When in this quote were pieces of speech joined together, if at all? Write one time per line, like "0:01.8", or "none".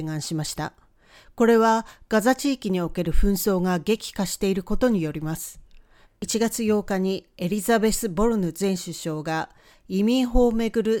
0:06.0